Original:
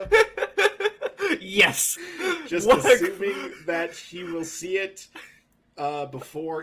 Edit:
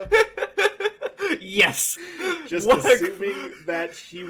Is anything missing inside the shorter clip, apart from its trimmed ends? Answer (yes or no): no